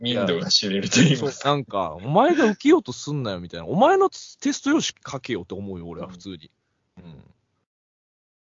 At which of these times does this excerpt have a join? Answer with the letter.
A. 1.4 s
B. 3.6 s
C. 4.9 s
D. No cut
C